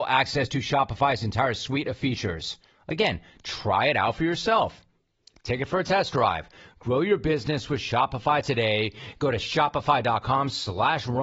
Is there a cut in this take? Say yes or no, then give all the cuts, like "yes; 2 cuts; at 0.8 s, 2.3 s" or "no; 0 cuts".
no; 0 cuts